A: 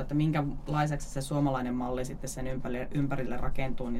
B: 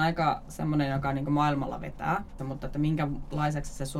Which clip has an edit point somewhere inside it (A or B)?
B